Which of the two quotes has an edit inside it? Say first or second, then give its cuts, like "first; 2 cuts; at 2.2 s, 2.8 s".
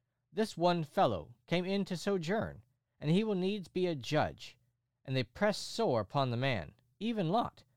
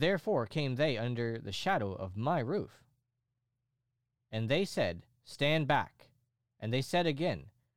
first; 1 cut; at 4.9 s